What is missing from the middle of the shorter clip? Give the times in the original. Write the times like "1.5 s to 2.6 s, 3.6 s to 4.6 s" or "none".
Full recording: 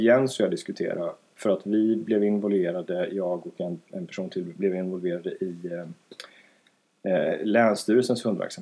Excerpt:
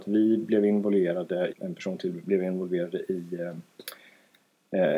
3.1 s to 3.8 s